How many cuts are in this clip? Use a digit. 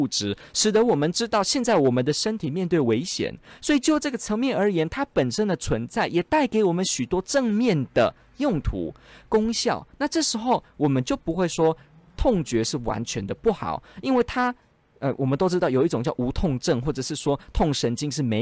0